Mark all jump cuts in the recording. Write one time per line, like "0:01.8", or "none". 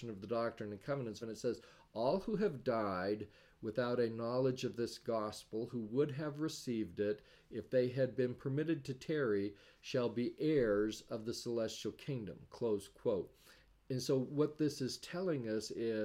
0:01.2